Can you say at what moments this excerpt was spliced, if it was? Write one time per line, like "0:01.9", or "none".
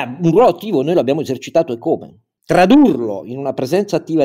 0:02.4